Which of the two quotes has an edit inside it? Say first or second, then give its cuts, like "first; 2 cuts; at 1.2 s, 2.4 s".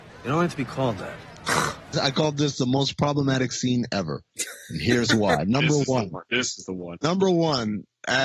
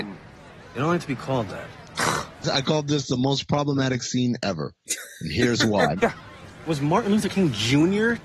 second; 1 cut; at 6.0 s